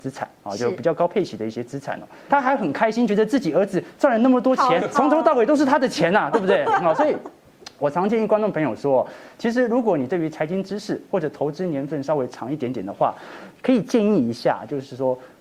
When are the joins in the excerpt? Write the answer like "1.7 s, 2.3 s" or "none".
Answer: 2.3 s, 4.9 s